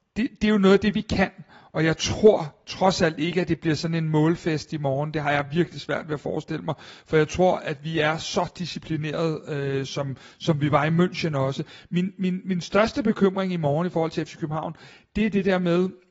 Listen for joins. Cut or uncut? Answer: uncut